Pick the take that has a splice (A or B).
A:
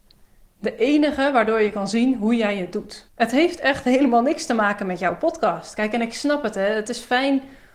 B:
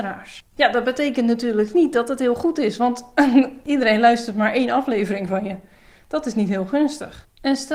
A